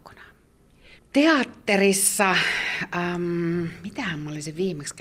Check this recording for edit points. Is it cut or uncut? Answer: cut